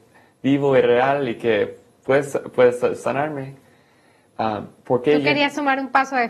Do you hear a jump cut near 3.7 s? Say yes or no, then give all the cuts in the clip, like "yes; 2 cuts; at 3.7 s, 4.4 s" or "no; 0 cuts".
no; 0 cuts